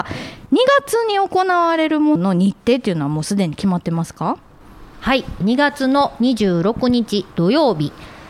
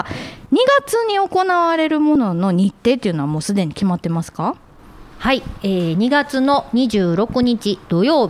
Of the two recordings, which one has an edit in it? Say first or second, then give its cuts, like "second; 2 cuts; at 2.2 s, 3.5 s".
first; 2 cuts; at 2.2 s, 5.4 s